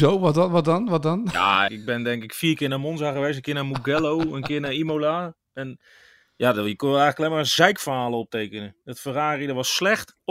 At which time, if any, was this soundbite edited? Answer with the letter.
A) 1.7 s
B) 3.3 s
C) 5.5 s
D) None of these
A